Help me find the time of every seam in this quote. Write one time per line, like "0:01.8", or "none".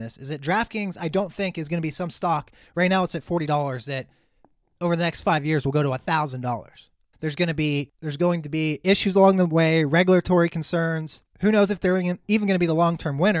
0:07.1